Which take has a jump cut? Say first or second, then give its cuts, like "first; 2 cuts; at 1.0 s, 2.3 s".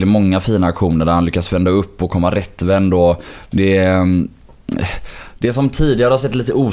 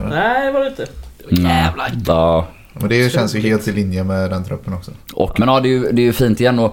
second; 2 cuts; at 2.0 s, 5.4 s